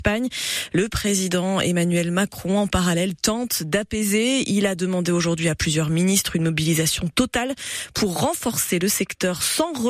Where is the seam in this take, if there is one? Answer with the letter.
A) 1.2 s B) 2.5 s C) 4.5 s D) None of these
D